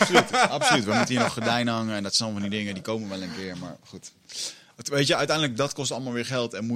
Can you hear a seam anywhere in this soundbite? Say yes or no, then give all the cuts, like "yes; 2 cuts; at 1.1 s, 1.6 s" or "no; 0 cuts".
no; 0 cuts